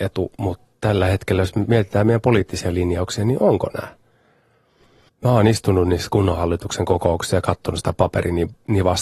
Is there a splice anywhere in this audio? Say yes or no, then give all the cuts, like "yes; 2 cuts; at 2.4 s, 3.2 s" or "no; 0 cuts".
yes; 1 cut; at 5.1 s